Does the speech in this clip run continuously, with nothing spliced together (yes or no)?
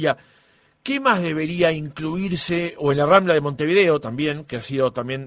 yes